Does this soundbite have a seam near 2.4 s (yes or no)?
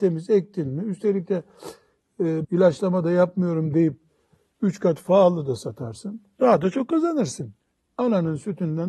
yes